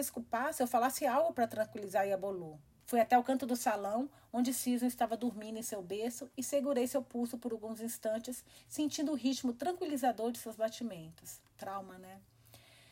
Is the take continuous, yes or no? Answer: no